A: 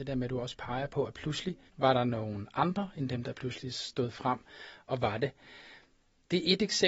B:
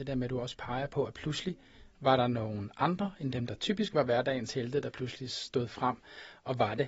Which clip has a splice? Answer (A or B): A